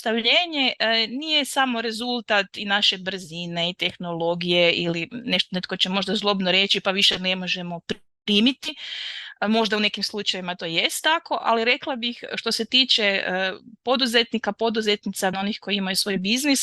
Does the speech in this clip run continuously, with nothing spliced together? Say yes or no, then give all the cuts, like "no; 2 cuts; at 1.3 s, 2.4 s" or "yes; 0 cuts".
no; 1 cut; at 15.3 s